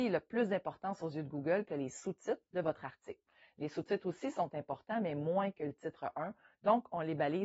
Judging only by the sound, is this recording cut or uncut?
uncut